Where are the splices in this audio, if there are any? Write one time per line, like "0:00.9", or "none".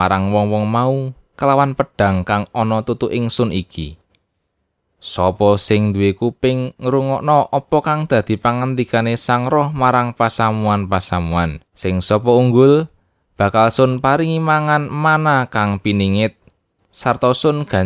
0:11.7